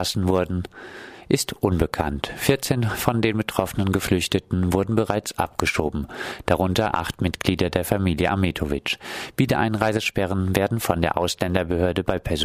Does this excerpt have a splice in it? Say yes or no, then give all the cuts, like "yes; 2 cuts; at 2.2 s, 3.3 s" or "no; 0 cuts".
no; 0 cuts